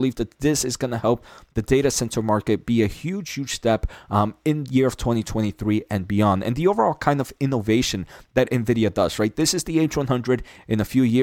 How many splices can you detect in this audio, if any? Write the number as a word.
zero